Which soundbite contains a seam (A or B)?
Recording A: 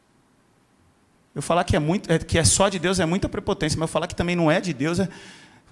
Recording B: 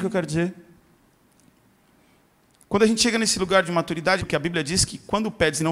B